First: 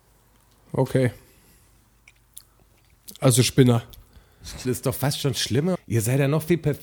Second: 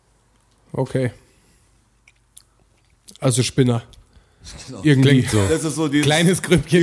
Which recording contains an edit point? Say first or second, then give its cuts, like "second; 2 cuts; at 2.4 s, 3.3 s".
first; 2 cuts; at 4.6 s, 5.7 s